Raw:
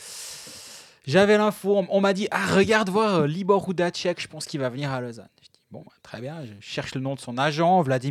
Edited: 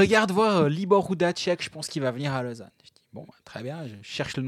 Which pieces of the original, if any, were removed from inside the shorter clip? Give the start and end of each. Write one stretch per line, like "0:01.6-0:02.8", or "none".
none